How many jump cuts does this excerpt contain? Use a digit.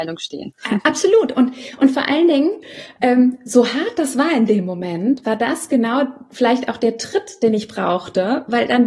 0